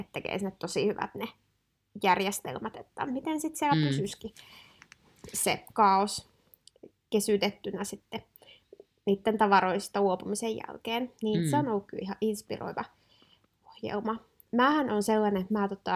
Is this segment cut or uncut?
uncut